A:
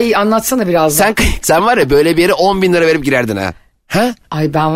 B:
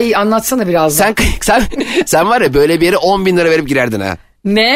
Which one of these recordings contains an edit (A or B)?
A